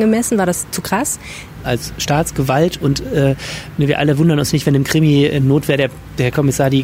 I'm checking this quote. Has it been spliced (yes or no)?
yes